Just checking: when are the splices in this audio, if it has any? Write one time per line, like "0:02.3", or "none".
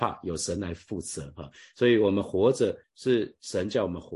0:02.8